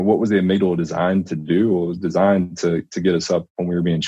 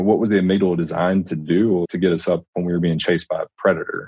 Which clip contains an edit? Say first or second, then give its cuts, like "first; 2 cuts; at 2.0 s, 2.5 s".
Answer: second; 1 cut; at 1.8 s